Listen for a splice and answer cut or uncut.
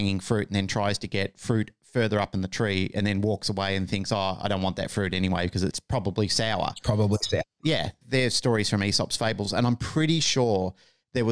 uncut